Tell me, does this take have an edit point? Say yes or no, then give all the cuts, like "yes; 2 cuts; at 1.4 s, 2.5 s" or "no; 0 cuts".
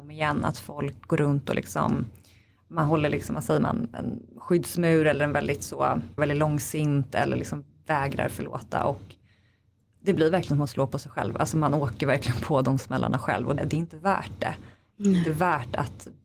yes; 2 cuts; at 6.2 s, 13.6 s